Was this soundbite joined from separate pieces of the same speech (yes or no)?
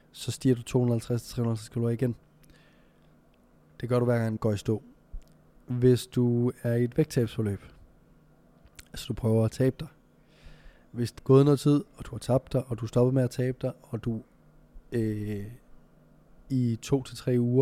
yes